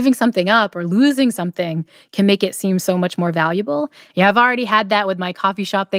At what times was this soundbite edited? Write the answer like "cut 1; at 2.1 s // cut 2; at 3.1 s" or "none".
cut 1; at 4.1 s